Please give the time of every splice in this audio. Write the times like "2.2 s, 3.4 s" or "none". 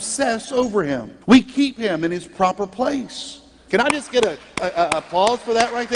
1.2 s, 3.7 s